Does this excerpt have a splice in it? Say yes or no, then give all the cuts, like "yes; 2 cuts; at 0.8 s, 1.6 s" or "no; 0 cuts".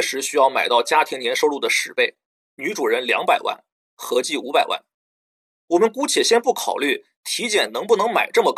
yes; 1 cut; at 2.5 s